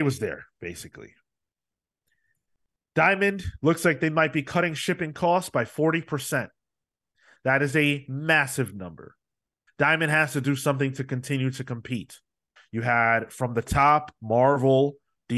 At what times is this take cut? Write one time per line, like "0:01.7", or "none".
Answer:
0:09.7
0:12.6